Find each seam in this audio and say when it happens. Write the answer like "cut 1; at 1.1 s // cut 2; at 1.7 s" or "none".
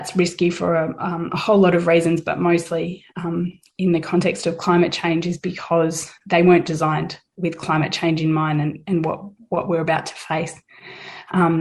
none